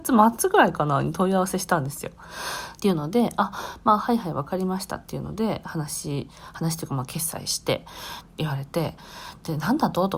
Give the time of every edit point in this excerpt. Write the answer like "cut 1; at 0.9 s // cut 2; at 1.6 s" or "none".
cut 1; at 2.8 s // cut 2; at 8.2 s